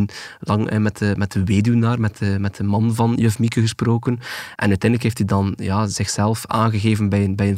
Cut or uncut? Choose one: cut